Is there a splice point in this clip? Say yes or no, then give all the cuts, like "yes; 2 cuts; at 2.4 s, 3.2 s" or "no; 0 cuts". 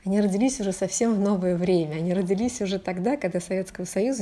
no; 0 cuts